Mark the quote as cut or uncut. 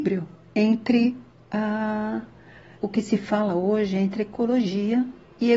cut